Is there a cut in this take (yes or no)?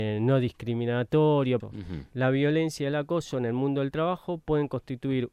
yes